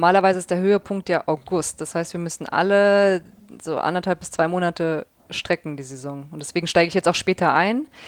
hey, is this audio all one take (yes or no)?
yes